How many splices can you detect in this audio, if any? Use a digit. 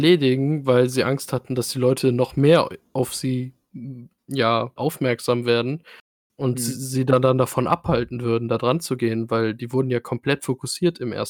1